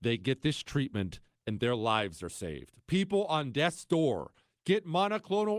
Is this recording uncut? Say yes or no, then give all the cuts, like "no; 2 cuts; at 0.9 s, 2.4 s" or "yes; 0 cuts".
yes; 0 cuts